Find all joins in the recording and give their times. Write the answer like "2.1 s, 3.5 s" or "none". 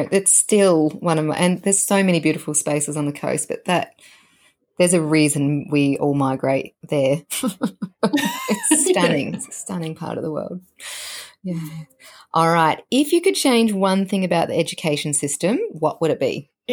none